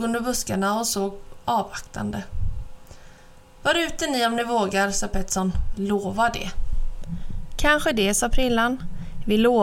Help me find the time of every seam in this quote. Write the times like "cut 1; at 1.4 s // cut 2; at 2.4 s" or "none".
cut 1; at 3.6 s // cut 2; at 5.7 s